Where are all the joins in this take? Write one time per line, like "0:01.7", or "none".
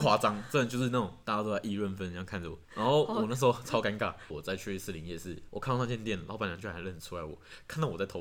0:02.0
0:04.3